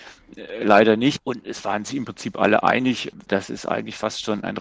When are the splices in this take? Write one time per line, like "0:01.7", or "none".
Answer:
0:01.2
0:03.3